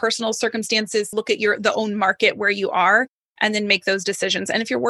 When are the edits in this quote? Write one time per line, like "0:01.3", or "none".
0:01.1